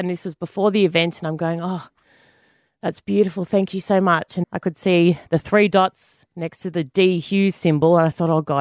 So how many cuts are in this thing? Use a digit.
1